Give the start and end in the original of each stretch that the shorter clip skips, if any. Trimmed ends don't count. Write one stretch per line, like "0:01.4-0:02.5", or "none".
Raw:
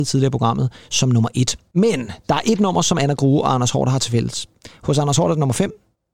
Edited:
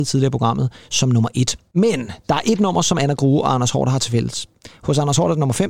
none